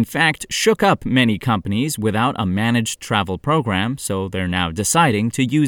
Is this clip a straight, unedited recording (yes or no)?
yes